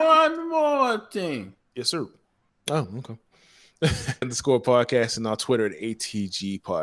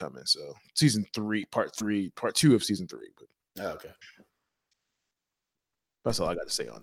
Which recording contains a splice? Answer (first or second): first